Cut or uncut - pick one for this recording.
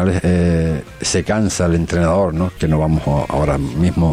cut